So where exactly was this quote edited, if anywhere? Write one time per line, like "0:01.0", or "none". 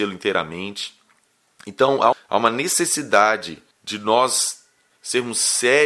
0:02.1
0:03.7

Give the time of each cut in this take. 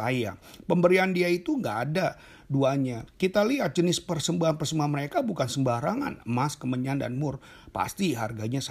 0:03.1

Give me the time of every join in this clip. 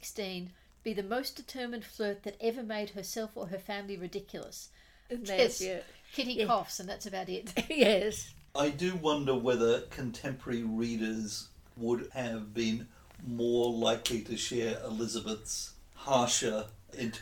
0:05.1

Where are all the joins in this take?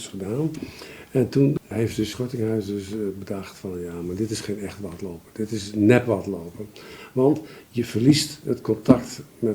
none

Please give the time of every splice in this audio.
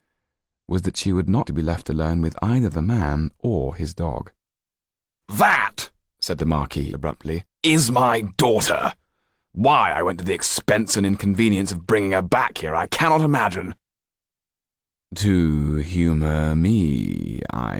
0:01.4
0:05.2

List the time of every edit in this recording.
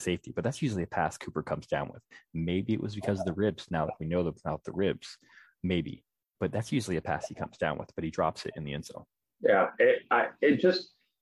0:09.2

